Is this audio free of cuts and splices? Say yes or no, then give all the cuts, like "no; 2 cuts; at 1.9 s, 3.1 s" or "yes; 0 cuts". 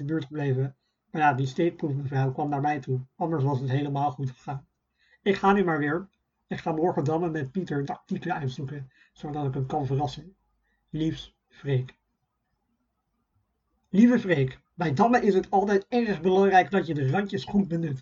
no; 2 cuts; at 7.8 s, 14.7 s